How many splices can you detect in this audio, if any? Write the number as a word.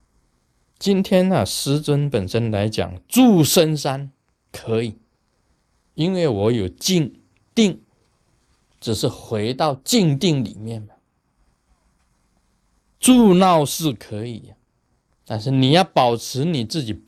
one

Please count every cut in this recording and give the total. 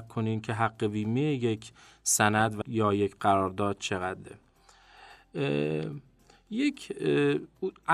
one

